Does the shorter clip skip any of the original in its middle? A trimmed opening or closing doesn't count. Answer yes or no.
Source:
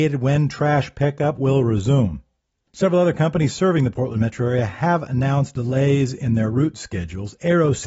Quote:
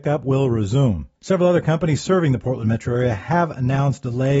yes